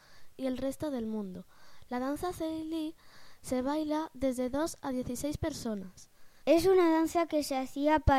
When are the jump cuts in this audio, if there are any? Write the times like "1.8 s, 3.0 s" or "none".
6.4 s